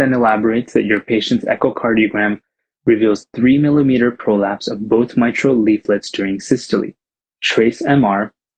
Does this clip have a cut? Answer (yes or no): no